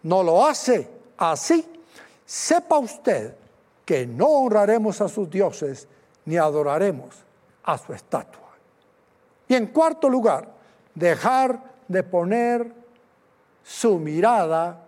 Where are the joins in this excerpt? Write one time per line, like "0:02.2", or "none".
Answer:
0:09.4